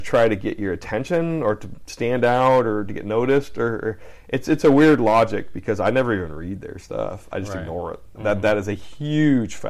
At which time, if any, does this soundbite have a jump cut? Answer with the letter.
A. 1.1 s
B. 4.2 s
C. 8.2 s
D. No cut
C